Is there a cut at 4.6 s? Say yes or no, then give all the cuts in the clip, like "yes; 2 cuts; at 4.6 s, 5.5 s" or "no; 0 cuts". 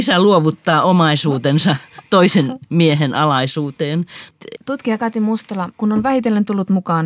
yes; 2 cuts; at 4.6 s, 5.7 s